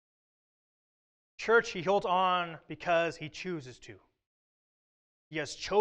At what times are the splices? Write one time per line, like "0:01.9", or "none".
none